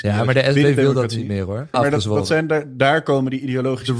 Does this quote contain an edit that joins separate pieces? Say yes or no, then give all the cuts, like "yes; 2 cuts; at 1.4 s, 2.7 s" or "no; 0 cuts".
yes; 1 cut; at 1.7 s